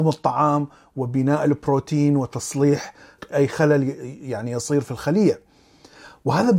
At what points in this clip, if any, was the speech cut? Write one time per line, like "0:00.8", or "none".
0:03.3

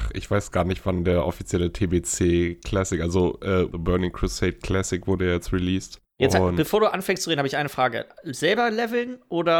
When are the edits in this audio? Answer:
0:03.7
0:06.1

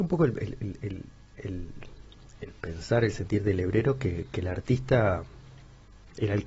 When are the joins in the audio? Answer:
none

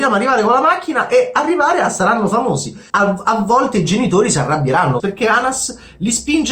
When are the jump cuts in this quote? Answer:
0:02.9
0:05.0

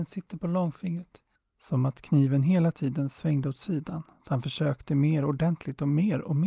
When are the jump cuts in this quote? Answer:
0:01.5

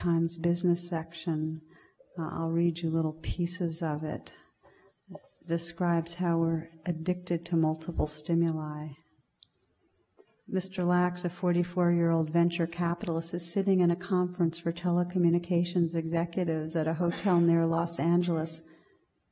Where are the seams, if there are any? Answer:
none

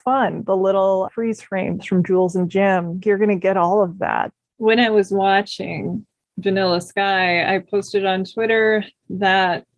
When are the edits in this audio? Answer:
0:01.1
0:03.0

